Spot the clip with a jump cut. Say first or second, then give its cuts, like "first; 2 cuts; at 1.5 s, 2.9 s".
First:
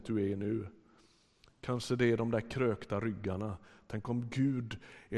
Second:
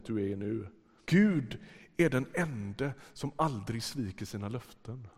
second; 1 cut; at 1.0 s